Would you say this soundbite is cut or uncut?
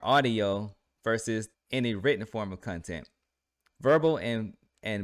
cut